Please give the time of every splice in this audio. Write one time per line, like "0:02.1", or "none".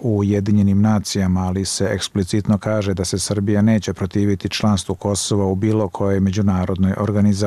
none